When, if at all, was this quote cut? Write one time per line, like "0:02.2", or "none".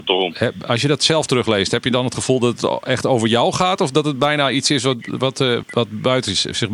0:05.6